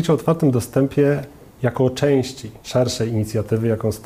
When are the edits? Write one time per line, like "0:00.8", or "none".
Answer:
0:02.6